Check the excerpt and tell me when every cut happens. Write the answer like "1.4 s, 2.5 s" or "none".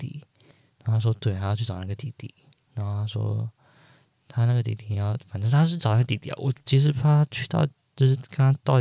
none